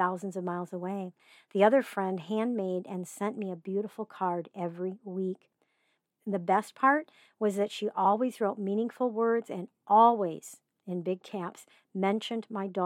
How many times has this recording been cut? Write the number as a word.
zero